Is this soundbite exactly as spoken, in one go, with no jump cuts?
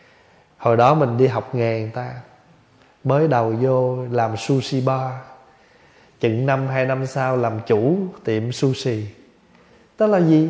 yes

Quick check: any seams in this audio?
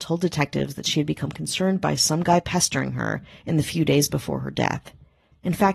no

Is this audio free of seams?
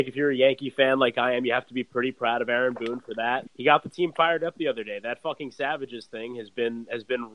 no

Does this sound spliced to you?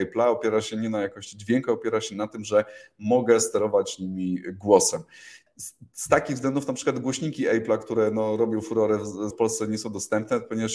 yes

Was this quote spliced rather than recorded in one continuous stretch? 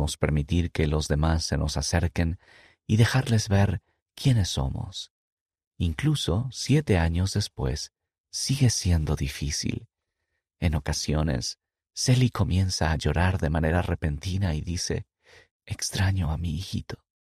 yes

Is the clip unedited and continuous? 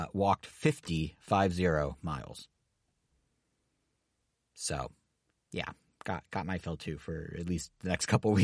yes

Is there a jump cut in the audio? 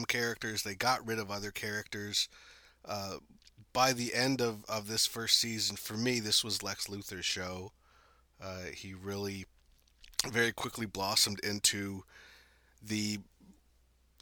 no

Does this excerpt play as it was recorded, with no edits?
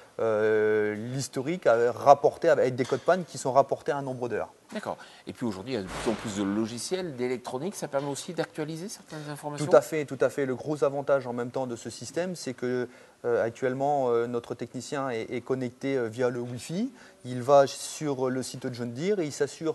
yes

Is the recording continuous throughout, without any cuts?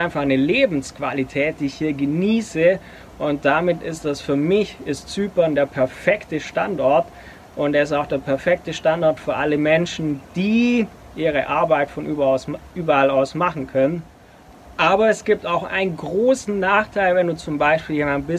yes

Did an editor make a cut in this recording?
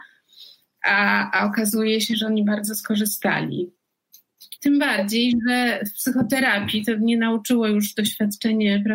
yes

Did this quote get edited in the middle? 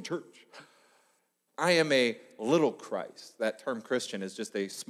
yes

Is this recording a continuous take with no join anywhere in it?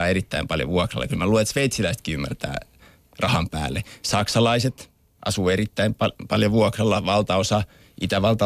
yes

